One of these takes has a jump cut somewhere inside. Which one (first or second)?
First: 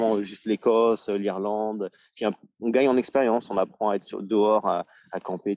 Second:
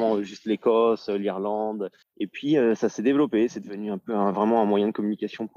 second